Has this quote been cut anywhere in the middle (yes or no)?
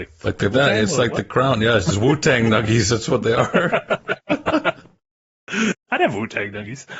no